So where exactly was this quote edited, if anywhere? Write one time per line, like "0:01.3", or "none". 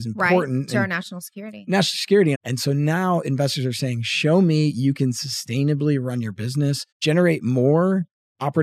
0:02.3
0:06.9